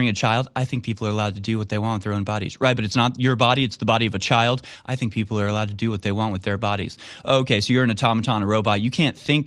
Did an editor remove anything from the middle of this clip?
no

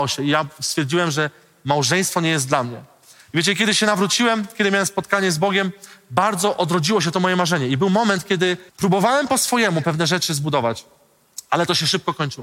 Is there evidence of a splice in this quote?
yes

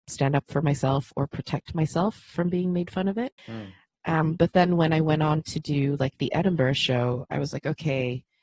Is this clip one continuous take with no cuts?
no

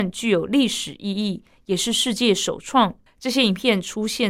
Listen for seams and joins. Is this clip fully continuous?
no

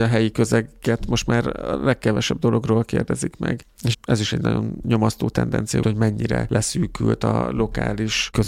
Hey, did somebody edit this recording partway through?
yes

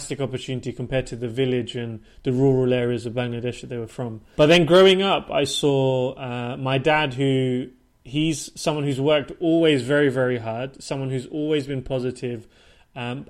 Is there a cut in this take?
yes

